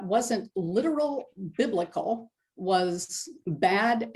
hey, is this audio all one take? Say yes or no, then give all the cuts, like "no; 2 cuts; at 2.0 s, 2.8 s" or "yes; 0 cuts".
yes; 0 cuts